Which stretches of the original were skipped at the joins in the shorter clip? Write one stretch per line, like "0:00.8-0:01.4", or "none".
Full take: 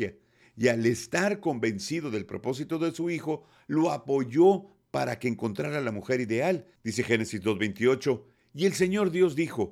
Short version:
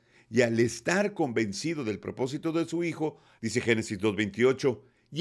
0:03.6-0:06.8